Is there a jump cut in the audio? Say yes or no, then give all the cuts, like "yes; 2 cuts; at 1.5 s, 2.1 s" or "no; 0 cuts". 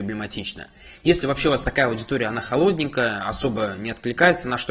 no; 0 cuts